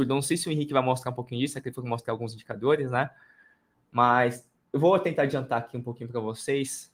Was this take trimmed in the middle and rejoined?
no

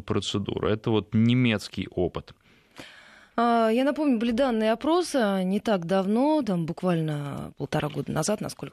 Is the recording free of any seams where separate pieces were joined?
yes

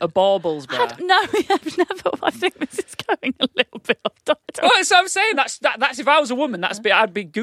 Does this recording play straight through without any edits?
no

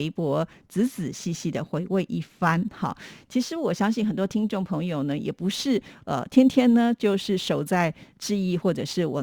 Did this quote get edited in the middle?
no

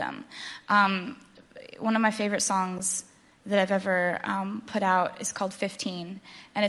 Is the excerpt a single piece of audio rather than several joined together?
yes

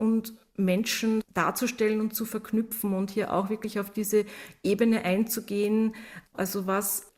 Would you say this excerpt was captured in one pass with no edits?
yes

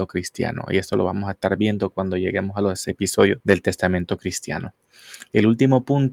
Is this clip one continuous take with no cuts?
no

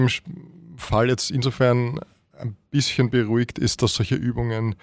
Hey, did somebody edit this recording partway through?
no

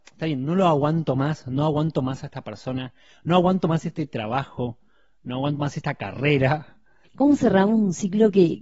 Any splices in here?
yes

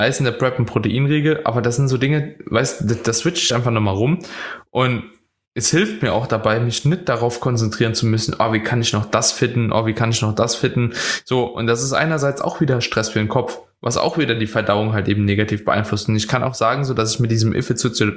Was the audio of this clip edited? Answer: no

